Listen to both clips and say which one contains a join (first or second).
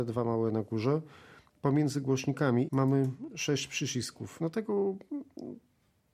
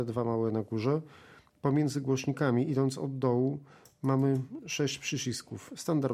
first